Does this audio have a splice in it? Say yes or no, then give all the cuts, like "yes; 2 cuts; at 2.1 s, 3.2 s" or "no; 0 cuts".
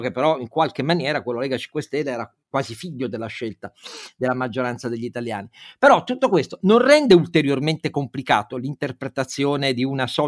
no; 0 cuts